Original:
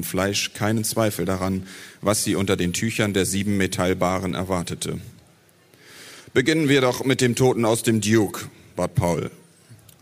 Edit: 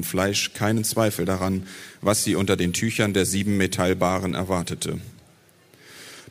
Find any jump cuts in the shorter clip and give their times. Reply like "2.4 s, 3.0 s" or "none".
none